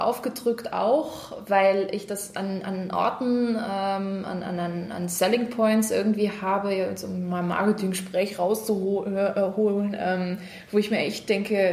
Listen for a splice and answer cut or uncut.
uncut